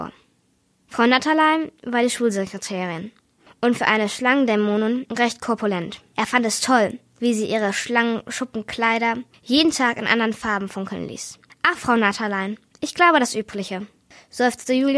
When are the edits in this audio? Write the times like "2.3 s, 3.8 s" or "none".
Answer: 6.1 s